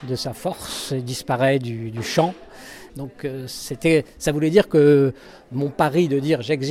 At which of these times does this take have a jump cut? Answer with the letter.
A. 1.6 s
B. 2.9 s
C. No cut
B